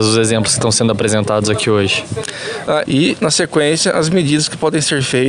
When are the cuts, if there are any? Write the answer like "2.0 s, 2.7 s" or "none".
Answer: 2.8 s